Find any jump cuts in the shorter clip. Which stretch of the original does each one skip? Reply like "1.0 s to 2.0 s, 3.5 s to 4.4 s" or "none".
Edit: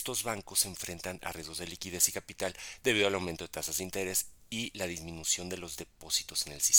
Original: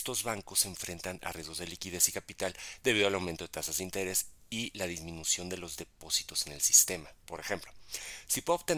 none